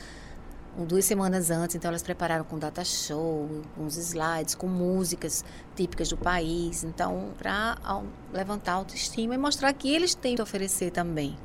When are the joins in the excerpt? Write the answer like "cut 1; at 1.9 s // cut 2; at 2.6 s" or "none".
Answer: cut 1; at 7.3 s // cut 2; at 10.4 s